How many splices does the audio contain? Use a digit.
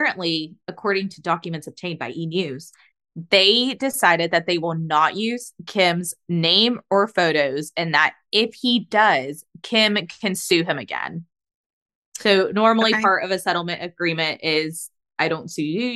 0